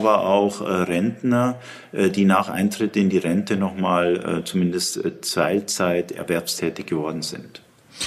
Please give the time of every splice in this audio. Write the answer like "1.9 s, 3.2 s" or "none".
none